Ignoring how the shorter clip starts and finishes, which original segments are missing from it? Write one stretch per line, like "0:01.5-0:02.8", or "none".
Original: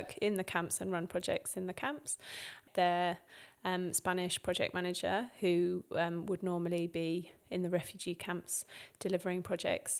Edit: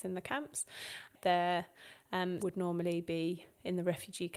0:03.9-0:06.3